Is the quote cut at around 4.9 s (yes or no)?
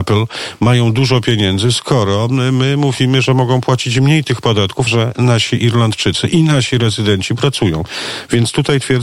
yes